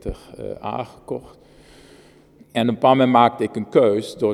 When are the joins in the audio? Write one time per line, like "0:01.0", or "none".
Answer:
0:02.4